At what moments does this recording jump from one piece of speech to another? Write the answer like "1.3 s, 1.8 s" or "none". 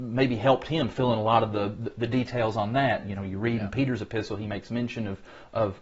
none